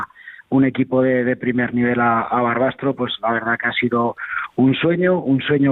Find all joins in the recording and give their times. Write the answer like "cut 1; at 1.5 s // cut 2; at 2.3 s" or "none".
none